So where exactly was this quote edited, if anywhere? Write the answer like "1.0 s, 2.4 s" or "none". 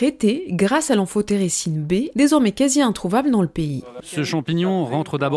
2.1 s, 4.0 s